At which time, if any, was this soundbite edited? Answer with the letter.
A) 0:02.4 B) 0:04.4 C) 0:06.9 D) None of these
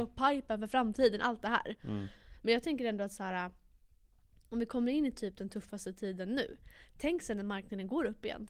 D